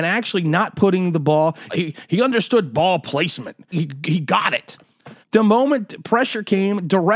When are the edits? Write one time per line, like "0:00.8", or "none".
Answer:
0:01.7
0:03.7
0:05.2